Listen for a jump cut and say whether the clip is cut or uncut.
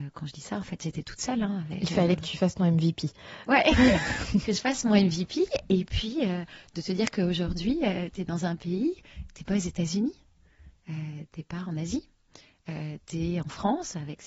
uncut